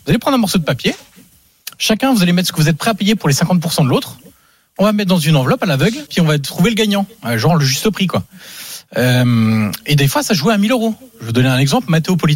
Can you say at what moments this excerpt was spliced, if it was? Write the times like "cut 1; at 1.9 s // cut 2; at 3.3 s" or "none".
cut 1; at 6.1 s